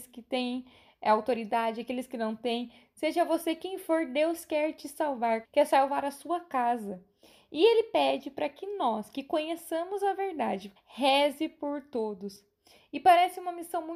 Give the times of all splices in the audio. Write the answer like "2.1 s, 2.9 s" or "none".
5.4 s, 10.8 s